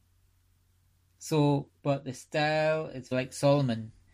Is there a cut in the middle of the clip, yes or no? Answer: yes